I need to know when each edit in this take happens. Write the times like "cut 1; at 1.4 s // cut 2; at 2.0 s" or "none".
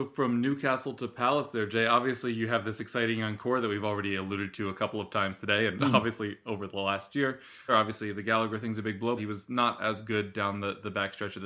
cut 1; at 7.7 s // cut 2; at 9.2 s